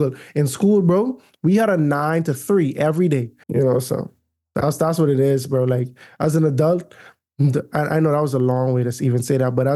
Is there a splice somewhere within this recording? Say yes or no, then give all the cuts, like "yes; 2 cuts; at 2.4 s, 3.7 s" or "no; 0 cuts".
yes; 1 cut; at 3.4 s